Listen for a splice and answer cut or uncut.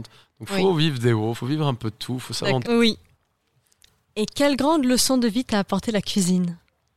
cut